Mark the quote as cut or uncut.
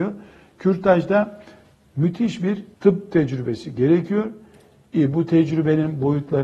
cut